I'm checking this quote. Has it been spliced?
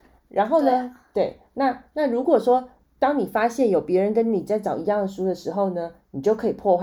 no; 0 cuts

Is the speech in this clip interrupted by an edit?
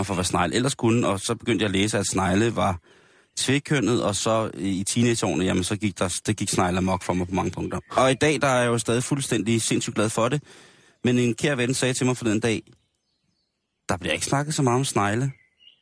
no; 0 cuts

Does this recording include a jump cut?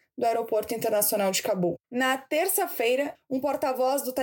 yes; 2 cuts; at 1.8 s, 3.1 s

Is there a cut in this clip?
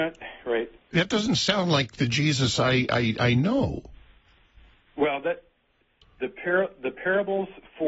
yes; 1 cut; at 6.2 s

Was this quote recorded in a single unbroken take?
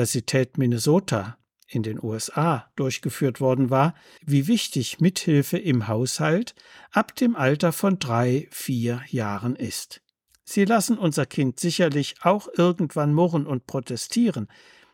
no; 2 cuts; at 4.2 s, 10.3 s

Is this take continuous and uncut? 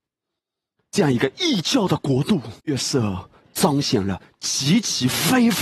no; 1 cut; at 2.6 s

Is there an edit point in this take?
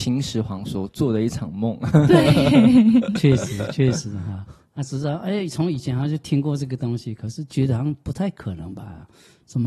no; 0 cuts

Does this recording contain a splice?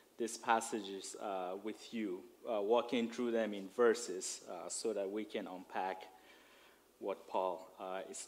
no; 0 cuts

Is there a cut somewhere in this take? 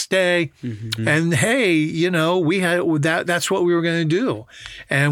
yes; 1 cut; at 1.0 s

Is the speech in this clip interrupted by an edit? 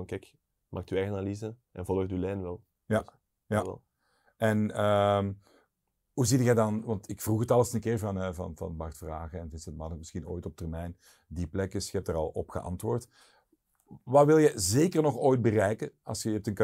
no; 0 cuts

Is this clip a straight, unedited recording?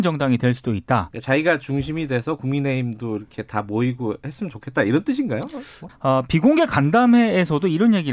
no; 2 cuts; at 1.1 s, 5.9 s

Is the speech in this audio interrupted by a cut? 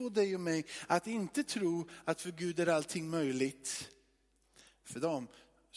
no; 0 cuts

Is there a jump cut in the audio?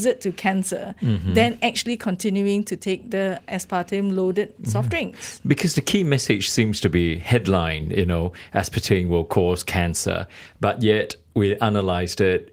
no; 0 cuts

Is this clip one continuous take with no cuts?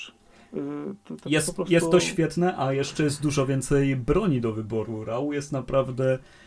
yes; 0 cuts

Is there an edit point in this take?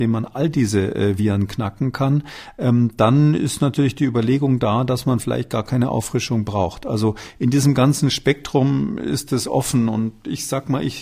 no; 0 cuts

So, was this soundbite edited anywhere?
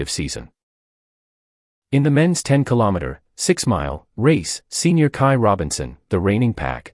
no; 0 cuts

